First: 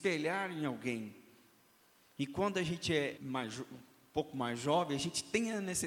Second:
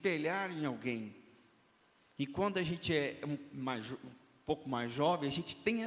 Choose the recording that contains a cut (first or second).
first